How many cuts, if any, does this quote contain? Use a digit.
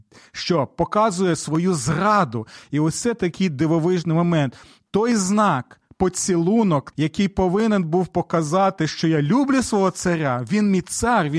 1